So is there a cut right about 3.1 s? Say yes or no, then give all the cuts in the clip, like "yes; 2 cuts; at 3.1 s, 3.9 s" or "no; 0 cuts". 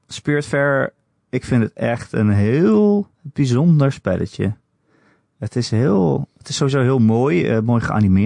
yes; 1 cut; at 3.1 s